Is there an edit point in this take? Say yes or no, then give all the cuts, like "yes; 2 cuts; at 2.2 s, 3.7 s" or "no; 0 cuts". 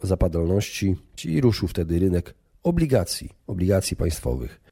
yes; 1 cut; at 1.2 s